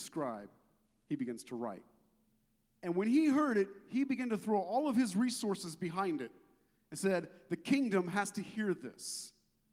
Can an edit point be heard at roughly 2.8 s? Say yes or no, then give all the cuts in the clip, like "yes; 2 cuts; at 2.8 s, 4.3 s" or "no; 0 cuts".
yes; 1 cut; at 2.8 s